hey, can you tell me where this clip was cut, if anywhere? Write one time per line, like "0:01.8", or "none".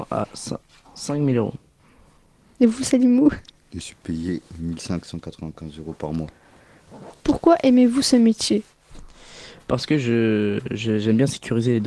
none